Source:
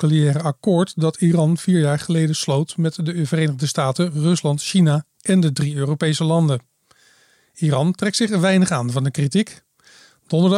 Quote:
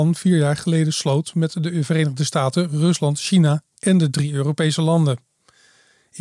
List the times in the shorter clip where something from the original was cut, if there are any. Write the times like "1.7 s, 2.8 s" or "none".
none